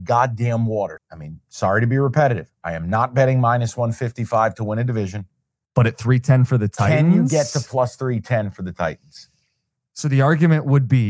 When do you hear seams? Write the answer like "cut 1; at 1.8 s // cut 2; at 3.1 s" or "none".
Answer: cut 1; at 1.0 s

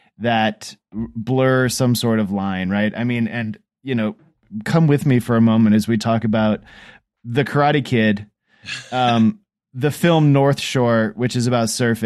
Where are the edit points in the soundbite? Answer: none

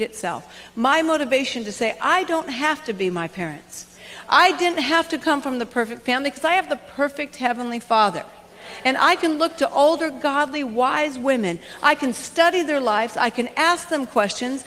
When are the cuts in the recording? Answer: none

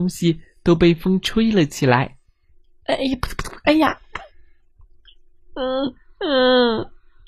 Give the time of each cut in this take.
cut 1; at 5.4 s

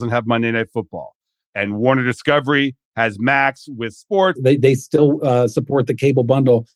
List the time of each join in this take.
cut 1; at 4.4 s

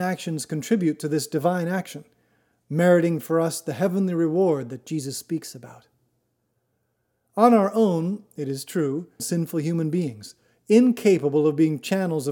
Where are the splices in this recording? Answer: cut 1; at 9.2 s

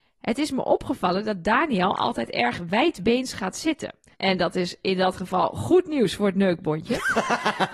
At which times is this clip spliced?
cut 1; at 4.1 s

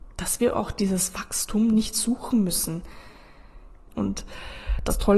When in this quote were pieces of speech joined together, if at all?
cut 1; at 3.9 s

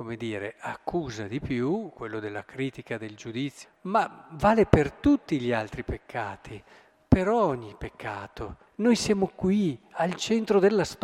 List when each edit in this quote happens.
cut 1; at 3.6 s // cut 2; at 8.7 s

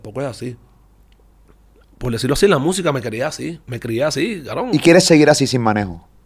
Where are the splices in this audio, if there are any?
cut 1; at 3.6 s

